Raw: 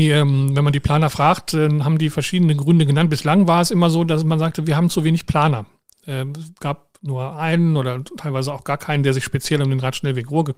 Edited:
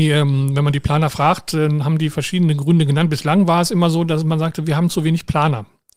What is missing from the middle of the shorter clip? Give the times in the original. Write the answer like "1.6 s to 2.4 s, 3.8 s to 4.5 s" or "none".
none